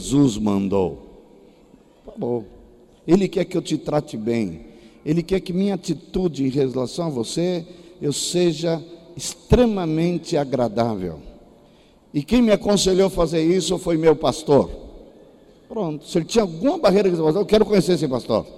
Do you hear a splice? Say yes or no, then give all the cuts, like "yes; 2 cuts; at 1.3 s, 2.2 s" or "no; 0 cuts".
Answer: no; 0 cuts